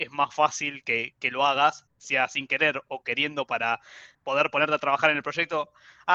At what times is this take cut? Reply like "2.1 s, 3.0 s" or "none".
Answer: 1.9 s, 4.1 s